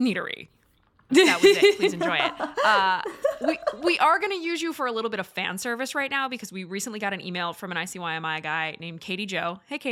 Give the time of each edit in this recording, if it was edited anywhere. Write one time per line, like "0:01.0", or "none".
0:01.1